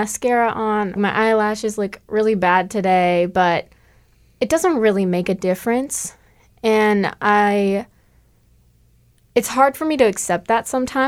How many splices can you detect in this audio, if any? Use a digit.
1